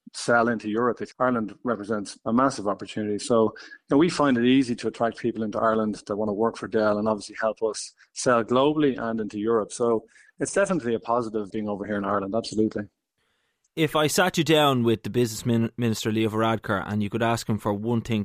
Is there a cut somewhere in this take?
yes; 2 cuts; at 1.1 s, 11.5 s

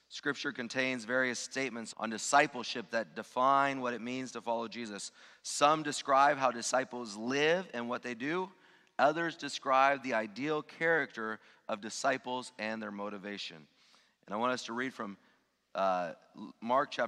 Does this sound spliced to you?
yes; 1 cut; at 1.9 s

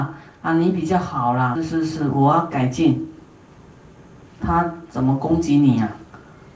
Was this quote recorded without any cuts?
no; 2 cuts; at 1.5 s, 4.4 s

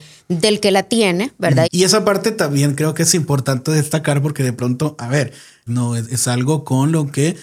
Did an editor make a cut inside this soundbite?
yes; 2 cuts; at 1.6 s, 5.7 s

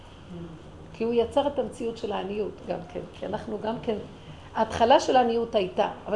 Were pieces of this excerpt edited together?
no; 0 cuts

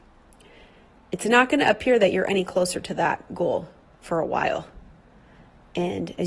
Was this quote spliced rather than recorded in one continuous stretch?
no; 0 cuts

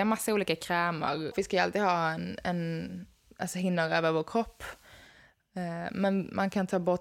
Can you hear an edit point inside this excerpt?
yes; 1 cut; at 1.3 s

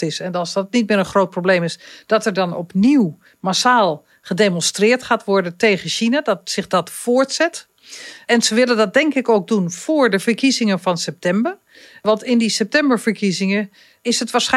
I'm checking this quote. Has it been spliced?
no; 0 cuts

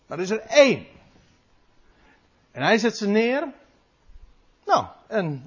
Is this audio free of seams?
yes; 0 cuts

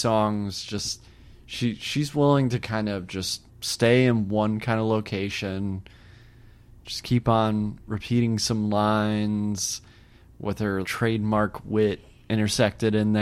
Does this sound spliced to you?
yes; 2 cuts; at 3.5 s, 10.8 s

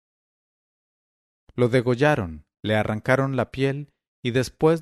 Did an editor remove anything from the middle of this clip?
yes; 1 cut; at 1.3 s

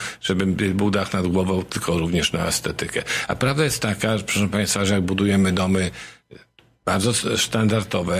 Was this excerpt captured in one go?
yes; 0 cuts

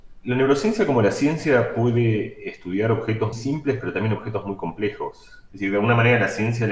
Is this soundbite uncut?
no; 2 cuts; at 3.3 s, 5.5 s

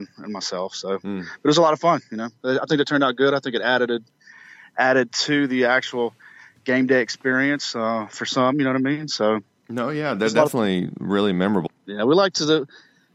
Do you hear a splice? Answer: yes; 1 cut; at 11.7 s

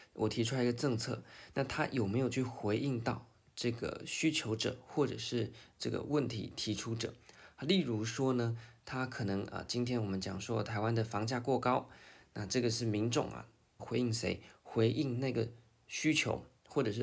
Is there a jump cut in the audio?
yes; 1 cut; at 13.8 s

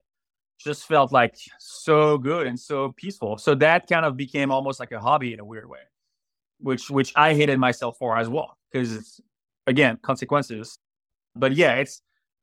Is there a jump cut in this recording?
no; 0 cuts

